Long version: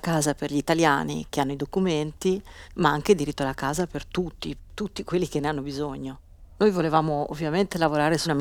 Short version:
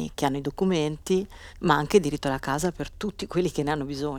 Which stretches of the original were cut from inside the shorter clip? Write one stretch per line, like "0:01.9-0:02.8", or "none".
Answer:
0:04.0-0:04.7